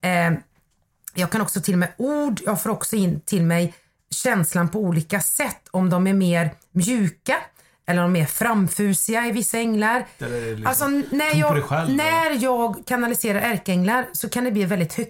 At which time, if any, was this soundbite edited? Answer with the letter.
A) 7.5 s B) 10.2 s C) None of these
B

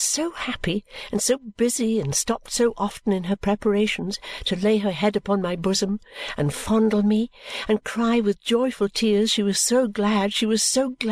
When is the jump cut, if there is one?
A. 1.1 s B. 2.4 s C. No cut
C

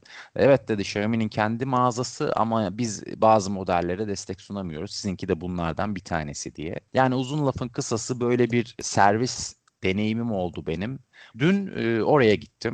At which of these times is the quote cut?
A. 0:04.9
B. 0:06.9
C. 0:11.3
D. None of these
C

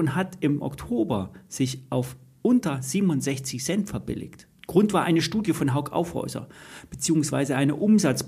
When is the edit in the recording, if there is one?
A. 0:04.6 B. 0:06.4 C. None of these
A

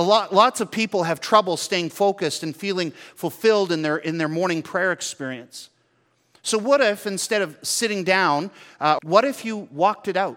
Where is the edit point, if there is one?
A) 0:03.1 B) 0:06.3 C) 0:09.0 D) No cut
C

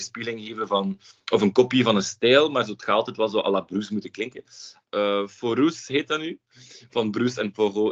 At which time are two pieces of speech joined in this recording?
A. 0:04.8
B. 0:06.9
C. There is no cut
A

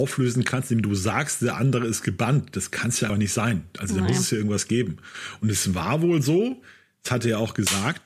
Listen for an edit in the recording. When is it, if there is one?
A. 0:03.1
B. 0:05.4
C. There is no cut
A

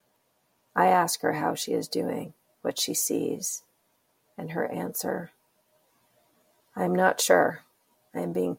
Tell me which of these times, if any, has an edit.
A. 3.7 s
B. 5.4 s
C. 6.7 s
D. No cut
D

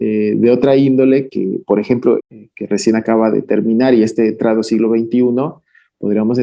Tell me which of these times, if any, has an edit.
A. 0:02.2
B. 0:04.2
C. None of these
A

